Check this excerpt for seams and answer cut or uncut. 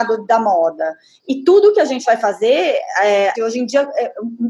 cut